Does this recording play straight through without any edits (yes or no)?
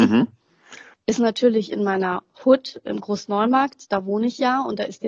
no